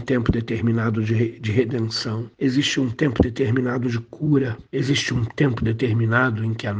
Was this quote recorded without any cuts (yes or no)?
no